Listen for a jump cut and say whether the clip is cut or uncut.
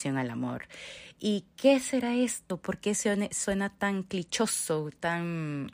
uncut